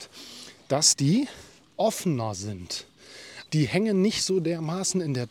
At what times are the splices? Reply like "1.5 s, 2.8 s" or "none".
3.5 s